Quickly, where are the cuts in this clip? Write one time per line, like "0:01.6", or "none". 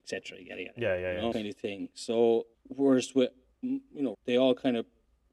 0:01.3
0:02.5
0:04.1